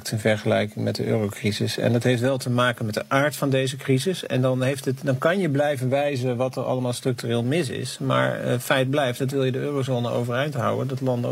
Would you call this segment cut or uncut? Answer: uncut